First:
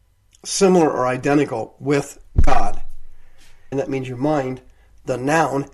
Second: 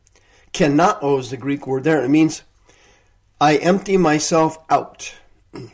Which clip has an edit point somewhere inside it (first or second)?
first